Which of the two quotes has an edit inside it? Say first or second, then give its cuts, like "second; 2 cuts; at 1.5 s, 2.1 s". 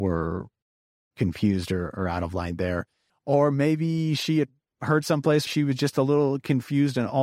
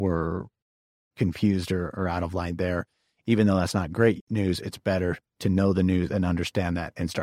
first; 2 cuts; at 3.1 s, 5.5 s